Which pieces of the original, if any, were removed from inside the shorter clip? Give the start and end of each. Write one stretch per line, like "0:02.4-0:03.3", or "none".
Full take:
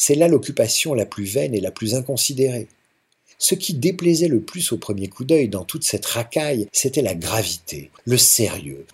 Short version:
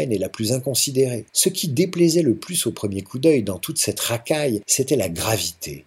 0:02.7-0:03.3